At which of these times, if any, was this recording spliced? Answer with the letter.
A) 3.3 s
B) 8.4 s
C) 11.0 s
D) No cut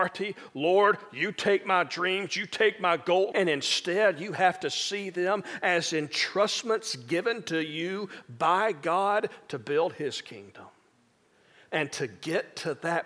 A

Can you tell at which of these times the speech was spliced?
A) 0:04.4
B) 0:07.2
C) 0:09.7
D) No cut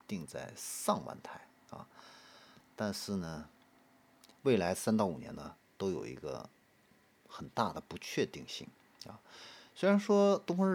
A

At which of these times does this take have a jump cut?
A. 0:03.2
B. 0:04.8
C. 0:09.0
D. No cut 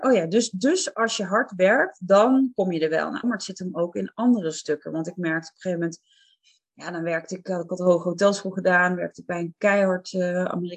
A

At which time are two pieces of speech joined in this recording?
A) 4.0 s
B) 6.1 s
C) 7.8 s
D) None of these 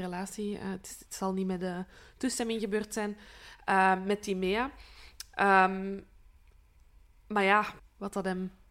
C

